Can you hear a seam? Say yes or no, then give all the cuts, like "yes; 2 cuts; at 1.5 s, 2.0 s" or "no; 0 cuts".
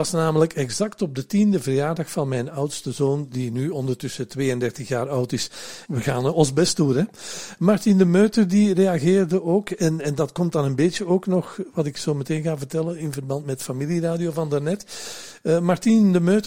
yes; 1 cut; at 5.9 s